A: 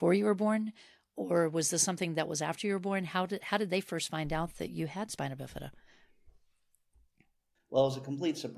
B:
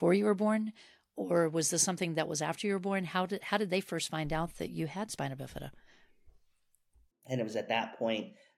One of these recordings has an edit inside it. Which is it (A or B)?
B